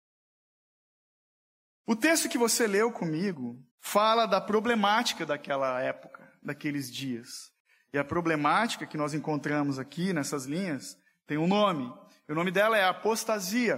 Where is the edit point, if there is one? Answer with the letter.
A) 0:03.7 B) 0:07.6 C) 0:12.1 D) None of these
A